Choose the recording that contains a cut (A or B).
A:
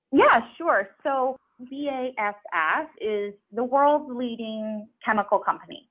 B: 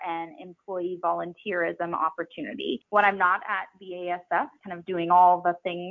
A